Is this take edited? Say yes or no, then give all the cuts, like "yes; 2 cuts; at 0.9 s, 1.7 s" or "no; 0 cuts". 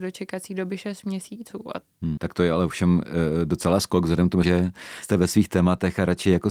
yes; 2 cuts; at 2.2 s, 4.4 s